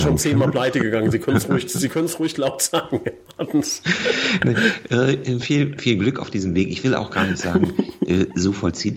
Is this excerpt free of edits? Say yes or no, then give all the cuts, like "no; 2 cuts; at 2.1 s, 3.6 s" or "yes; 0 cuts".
yes; 0 cuts